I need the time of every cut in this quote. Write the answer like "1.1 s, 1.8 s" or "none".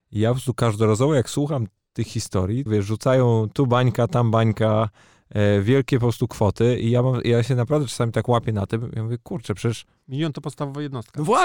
2.7 s